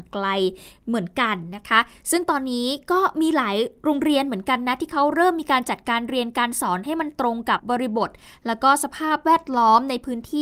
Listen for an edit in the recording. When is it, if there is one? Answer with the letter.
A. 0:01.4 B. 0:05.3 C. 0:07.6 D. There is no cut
C